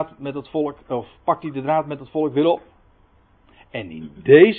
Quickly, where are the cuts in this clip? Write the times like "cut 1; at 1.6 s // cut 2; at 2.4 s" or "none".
none